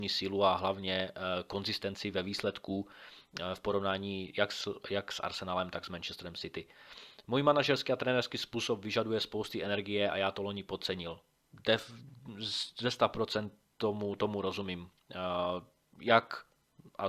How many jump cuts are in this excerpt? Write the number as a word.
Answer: zero